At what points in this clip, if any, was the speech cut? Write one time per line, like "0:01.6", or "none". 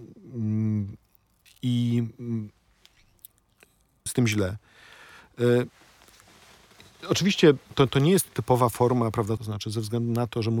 0:04.1
0:09.4